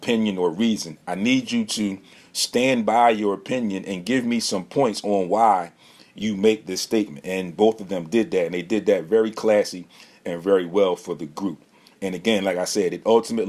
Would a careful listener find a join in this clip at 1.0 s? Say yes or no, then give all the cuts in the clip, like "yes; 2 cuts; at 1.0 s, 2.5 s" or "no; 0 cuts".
no; 0 cuts